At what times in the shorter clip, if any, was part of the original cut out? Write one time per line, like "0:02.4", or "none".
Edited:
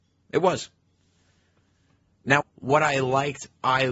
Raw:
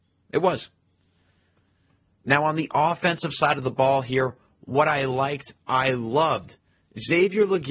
0:02.4

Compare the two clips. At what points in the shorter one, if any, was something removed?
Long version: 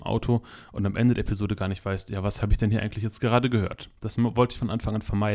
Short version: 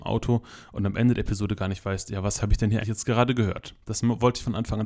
0:02.8

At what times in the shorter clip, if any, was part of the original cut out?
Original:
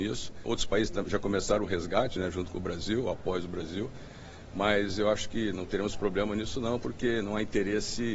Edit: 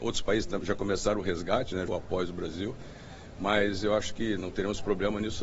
0:01.9

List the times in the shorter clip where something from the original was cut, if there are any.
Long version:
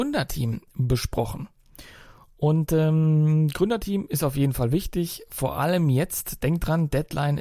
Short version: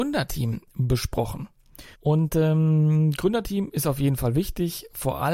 0:01.9

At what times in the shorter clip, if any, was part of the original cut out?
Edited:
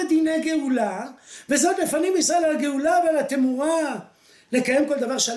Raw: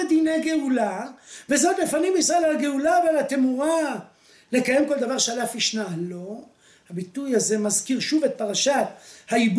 none

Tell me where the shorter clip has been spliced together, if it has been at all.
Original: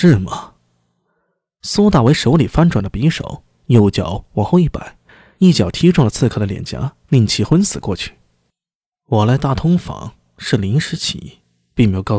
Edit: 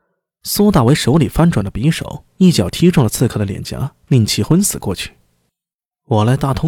0:02.4

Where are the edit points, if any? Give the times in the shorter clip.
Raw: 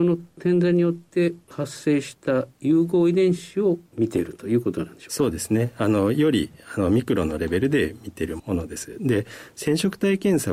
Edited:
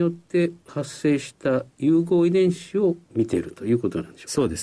none

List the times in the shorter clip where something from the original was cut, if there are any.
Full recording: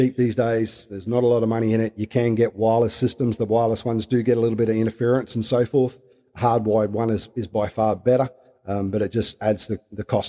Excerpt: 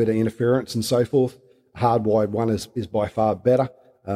none

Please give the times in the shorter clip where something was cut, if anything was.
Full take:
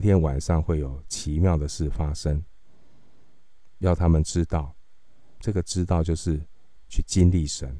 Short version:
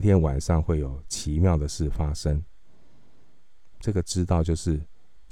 0:03.7

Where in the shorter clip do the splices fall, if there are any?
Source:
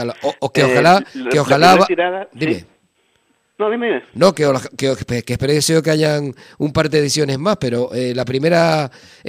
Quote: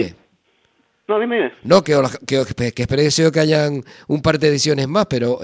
none

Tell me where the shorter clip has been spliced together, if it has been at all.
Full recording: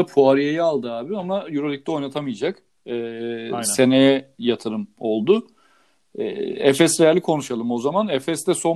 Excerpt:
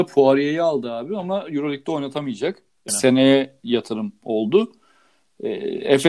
0:02.9

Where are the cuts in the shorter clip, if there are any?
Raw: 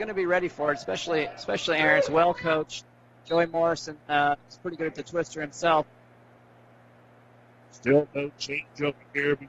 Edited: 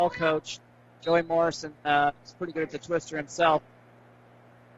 none

